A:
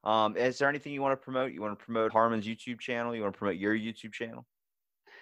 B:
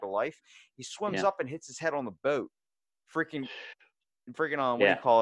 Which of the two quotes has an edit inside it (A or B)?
A